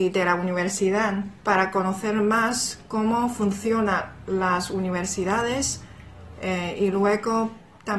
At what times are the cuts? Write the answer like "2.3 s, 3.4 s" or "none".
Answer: none